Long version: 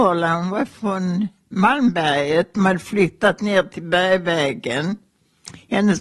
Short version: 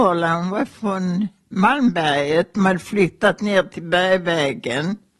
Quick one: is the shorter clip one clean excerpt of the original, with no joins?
yes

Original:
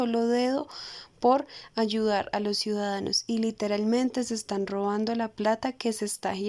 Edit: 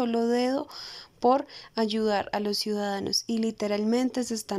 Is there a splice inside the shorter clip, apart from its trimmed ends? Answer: no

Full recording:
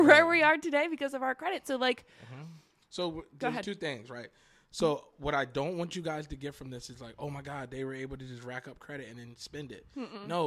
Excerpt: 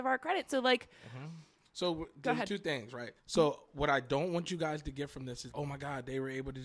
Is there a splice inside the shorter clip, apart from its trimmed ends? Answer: yes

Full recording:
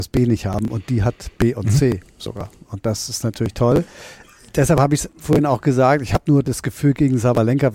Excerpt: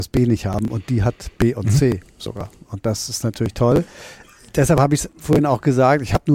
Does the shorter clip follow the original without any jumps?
yes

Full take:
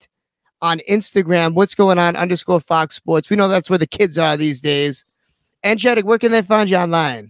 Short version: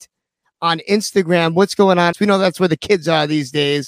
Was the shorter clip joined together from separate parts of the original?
yes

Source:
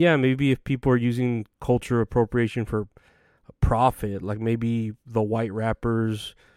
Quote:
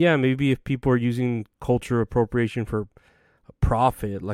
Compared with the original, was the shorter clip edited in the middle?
no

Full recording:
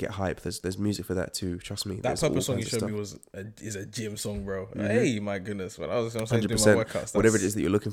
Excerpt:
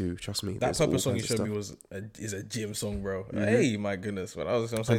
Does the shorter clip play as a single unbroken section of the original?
yes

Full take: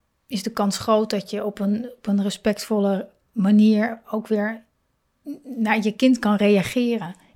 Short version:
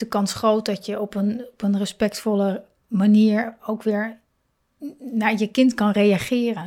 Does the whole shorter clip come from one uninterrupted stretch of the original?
yes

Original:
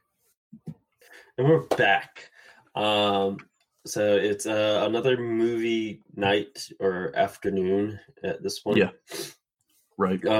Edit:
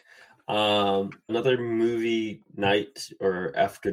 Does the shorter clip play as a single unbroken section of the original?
no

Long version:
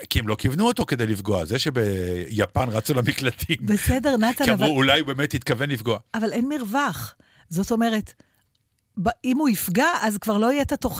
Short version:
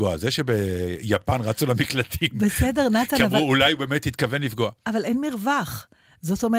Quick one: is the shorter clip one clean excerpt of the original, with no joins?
yes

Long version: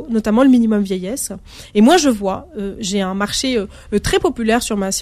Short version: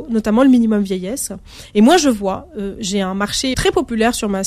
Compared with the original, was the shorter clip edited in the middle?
yes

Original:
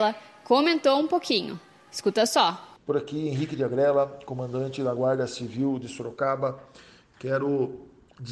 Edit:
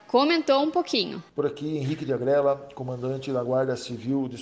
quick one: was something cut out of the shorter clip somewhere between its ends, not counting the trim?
yes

